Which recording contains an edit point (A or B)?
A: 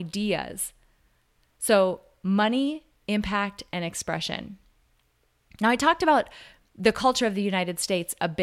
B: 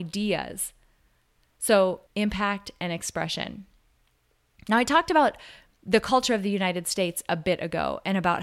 B